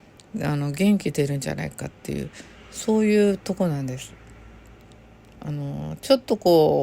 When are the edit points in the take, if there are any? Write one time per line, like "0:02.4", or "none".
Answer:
none